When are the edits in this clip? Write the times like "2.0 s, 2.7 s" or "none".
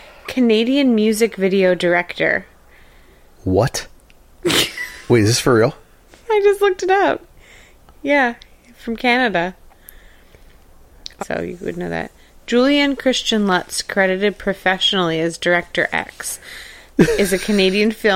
11.2 s